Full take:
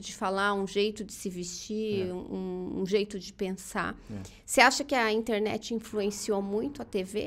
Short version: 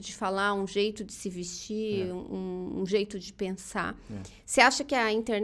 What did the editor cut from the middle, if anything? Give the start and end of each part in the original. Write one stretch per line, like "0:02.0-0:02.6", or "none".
none